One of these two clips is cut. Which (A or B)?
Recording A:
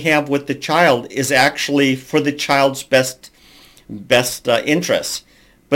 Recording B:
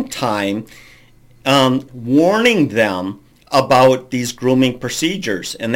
B